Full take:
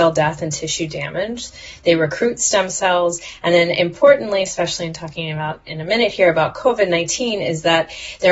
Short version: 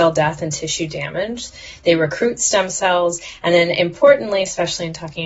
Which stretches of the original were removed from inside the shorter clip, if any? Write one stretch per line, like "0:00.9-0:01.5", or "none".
none